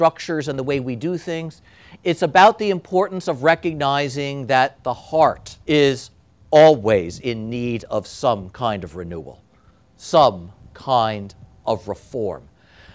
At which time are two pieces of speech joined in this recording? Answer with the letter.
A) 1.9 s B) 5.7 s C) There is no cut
B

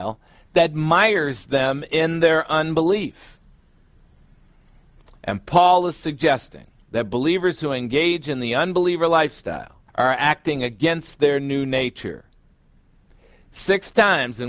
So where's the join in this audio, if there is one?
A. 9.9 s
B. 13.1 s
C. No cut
A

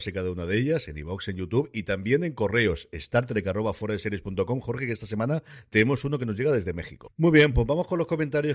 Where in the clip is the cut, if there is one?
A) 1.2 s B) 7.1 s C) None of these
B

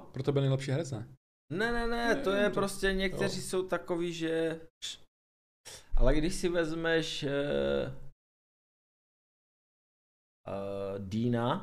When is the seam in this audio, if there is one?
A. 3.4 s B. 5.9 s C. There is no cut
C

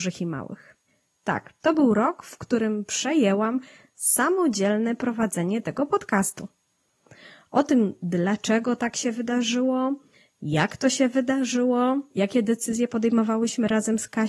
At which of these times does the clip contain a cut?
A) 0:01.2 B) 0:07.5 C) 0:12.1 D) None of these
C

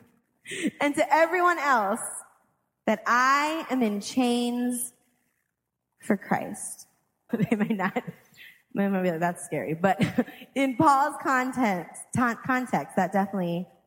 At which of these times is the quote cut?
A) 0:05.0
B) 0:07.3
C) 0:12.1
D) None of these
B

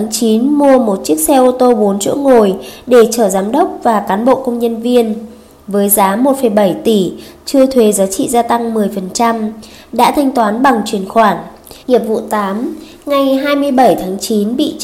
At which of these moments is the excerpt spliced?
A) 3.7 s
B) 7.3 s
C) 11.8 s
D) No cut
C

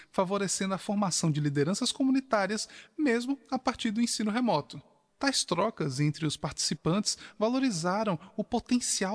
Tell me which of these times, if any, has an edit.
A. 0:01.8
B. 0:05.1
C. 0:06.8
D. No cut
B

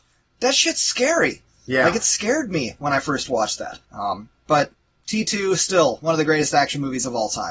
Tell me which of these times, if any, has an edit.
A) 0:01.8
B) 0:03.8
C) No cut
B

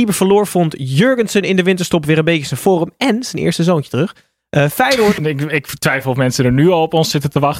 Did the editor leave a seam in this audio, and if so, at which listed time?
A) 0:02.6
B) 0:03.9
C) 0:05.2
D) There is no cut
C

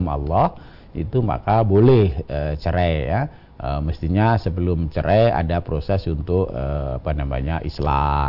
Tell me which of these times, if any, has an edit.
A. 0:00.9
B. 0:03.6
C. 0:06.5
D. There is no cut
B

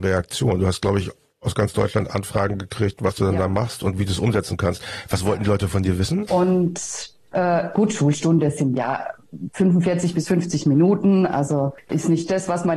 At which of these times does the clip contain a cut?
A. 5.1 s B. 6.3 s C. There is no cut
B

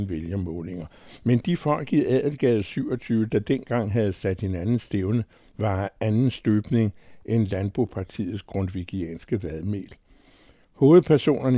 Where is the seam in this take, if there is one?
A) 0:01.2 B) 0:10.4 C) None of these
C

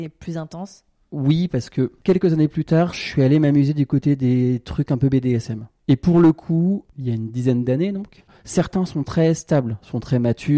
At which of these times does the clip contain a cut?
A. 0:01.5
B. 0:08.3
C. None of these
B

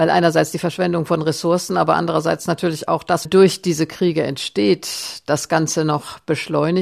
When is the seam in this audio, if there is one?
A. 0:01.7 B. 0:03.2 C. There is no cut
B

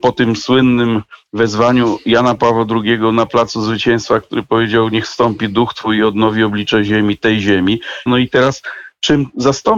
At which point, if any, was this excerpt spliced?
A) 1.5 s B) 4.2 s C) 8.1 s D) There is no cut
C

